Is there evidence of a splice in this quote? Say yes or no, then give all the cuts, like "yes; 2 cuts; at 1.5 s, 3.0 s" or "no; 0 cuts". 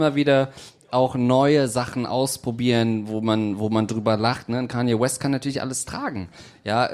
no; 0 cuts